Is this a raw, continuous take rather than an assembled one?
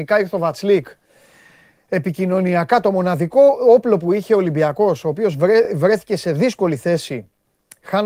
yes; 0 cuts

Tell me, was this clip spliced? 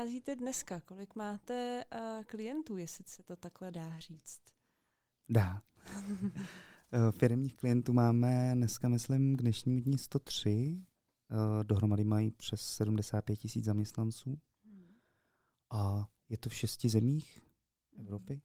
no; 0 cuts

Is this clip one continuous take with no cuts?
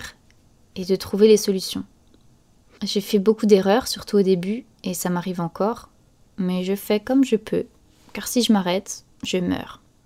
no; 1 cut; at 2.8 s

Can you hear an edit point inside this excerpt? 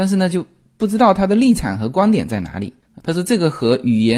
yes; 1 cut; at 3.0 s

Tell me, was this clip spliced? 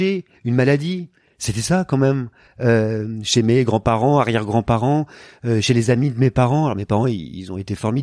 no; 0 cuts

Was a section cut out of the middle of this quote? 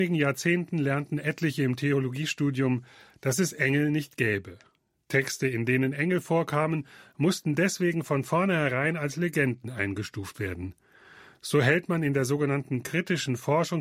no; 0 cuts

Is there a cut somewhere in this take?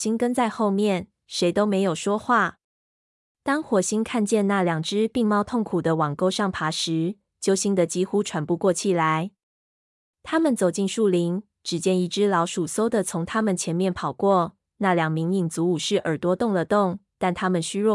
no; 0 cuts

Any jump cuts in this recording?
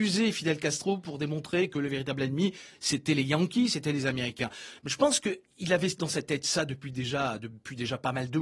no; 0 cuts

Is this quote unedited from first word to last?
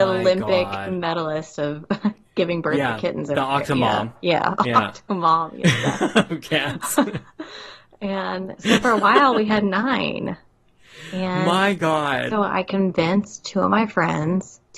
yes; 0 cuts

